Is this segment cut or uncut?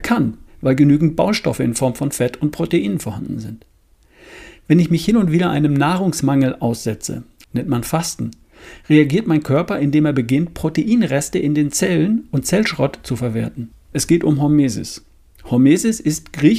cut